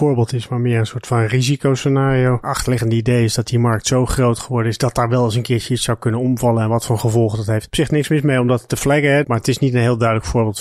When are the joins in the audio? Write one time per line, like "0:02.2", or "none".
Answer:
0:09.2